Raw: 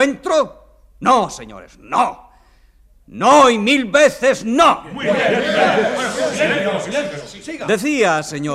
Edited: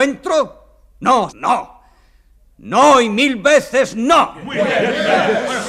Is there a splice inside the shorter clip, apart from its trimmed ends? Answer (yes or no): yes